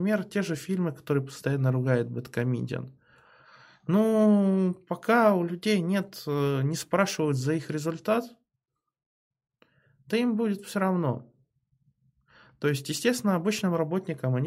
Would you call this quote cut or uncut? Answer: uncut